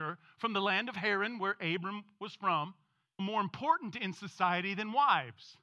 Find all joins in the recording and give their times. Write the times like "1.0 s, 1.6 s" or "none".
3.2 s